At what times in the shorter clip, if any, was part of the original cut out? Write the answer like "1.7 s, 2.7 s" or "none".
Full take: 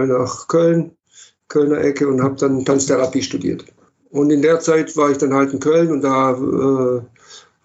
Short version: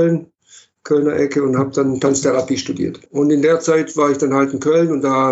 3.1 s